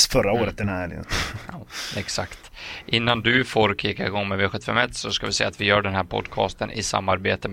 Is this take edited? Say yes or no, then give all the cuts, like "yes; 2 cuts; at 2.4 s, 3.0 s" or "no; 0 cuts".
yes; 1 cut; at 1.0 s